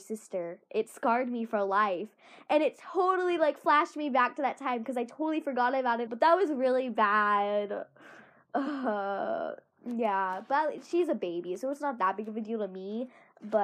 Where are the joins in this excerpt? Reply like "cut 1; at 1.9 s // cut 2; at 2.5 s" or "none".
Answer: cut 1; at 6.1 s